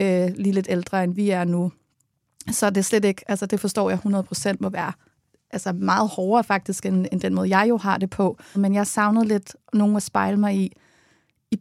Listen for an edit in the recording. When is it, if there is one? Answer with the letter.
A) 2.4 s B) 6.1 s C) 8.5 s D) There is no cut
C